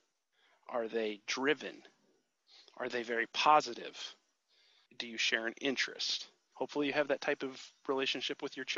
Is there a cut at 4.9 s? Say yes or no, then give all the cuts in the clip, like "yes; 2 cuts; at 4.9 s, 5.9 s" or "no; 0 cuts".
yes; 2 cuts; at 4.9 s, 6.5 s